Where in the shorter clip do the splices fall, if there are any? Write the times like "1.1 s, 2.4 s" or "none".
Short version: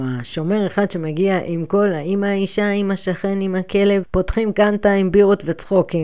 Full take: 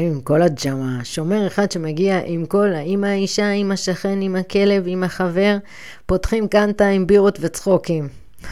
4.0 s